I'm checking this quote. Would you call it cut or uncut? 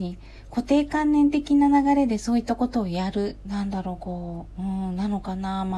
cut